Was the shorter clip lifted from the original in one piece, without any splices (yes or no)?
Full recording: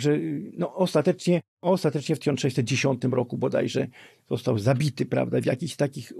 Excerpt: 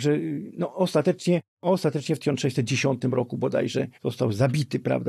no